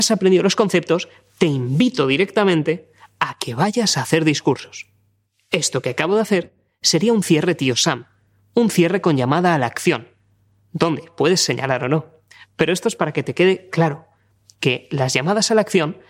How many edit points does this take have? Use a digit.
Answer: 0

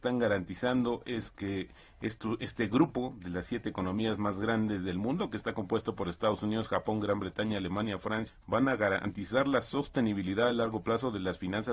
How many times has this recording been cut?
1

